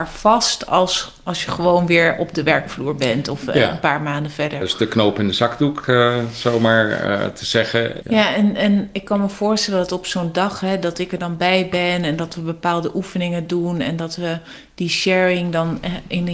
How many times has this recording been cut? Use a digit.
2